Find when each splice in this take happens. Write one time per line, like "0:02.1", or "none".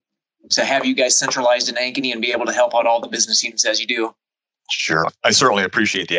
none